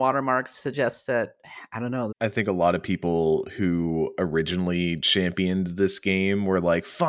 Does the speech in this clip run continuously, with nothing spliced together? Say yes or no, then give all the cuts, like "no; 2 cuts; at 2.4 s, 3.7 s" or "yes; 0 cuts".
no; 1 cut; at 2.1 s